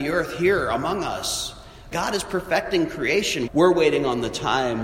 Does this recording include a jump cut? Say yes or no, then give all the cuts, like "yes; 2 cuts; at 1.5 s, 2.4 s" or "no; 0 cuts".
yes; 2 cuts; at 1.9 s, 3.5 s